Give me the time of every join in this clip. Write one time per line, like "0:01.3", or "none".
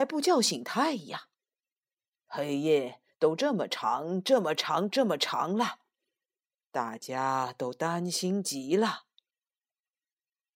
none